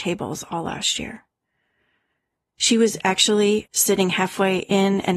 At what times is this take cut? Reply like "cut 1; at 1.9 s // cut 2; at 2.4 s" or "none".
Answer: cut 1; at 3.7 s